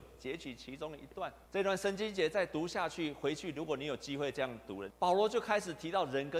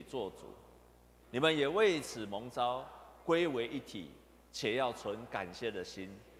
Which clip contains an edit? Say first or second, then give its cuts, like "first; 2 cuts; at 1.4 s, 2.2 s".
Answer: first; 2 cuts; at 1.4 s, 4.9 s